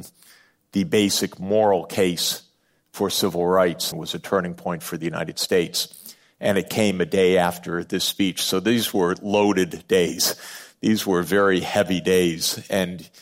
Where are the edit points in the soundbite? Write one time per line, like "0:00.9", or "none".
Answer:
0:03.9